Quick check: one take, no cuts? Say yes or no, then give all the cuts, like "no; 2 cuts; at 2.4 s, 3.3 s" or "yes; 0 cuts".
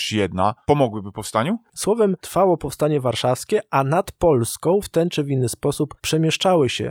no; 2 cuts; at 1.7 s, 4.8 s